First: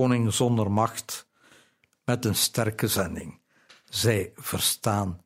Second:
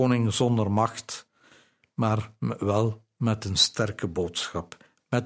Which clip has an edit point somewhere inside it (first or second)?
first